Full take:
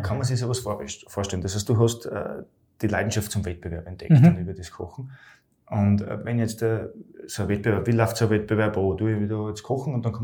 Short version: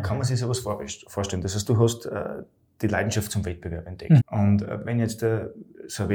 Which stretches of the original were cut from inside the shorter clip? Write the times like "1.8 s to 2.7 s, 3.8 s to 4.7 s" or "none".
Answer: 4.2 s to 5.6 s